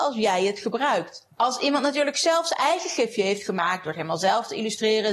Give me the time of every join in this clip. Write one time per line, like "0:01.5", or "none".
0:01.3